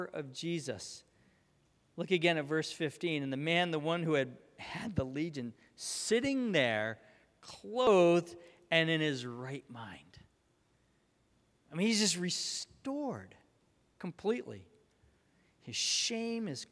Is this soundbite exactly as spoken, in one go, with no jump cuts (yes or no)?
yes